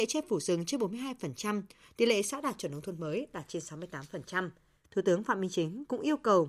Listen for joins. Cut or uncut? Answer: cut